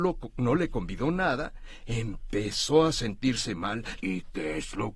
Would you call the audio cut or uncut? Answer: cut